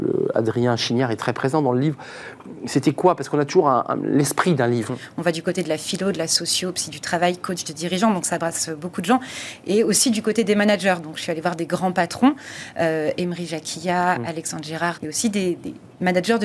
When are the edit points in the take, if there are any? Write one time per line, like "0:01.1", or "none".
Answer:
0:04.9
0:14.9